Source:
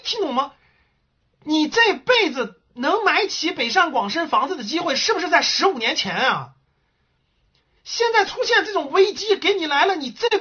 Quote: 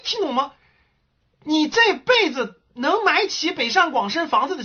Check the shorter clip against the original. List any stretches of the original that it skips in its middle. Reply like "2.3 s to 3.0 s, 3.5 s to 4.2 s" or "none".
none